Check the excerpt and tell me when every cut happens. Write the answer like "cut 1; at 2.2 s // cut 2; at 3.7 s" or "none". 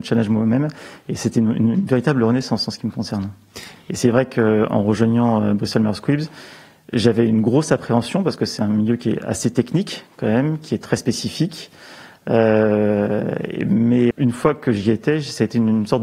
cut 1; at 3.8 s // cut 2; at 14.1 s